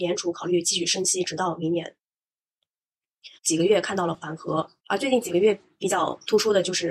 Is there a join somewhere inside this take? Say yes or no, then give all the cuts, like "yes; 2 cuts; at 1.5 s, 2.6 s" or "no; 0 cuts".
yes; 2 cuts; at 3.4 s, 4.8 s